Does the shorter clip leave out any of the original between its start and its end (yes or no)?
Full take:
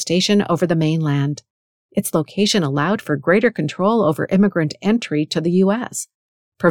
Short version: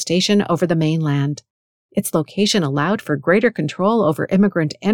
no